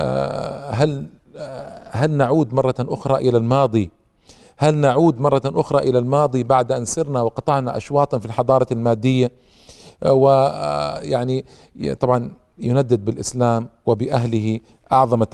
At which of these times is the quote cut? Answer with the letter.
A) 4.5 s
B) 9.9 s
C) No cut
C